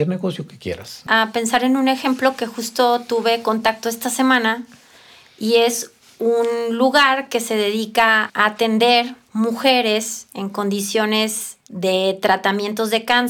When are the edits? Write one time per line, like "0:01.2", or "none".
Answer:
0:01.1
0:08.3